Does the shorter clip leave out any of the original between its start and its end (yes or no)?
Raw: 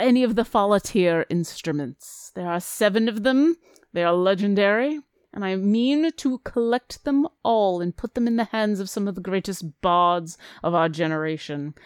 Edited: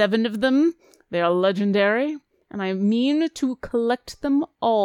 no